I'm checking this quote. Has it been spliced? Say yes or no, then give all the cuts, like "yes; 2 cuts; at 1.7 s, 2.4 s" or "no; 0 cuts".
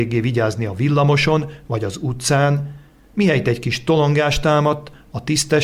no; 0 cuts